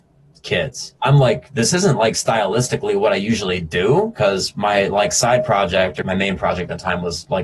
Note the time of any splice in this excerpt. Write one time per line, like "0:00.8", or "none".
0:01.0
0:06.0